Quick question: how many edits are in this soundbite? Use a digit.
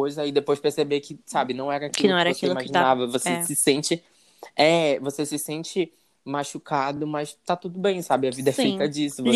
0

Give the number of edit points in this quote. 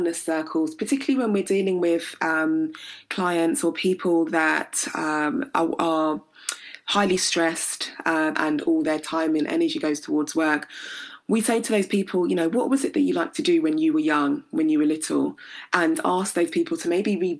1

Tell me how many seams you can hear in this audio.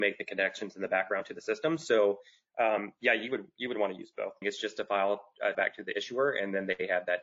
2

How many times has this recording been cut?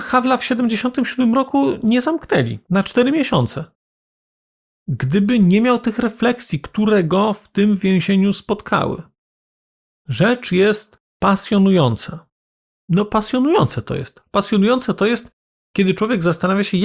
1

